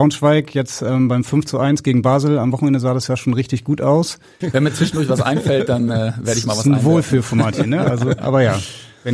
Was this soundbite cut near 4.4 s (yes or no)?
yes